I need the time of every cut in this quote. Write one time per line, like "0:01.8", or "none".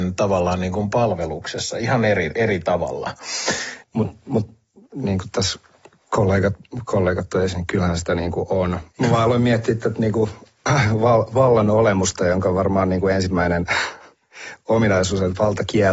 0:03.8
0:08.9